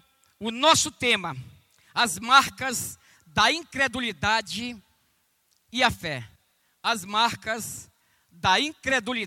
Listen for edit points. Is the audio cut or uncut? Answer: uncut